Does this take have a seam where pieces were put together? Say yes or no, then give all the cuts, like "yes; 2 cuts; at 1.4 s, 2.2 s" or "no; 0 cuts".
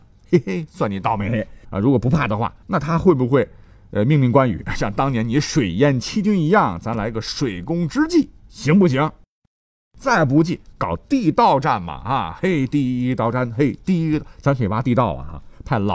yes; 1 cut; at 1.6 s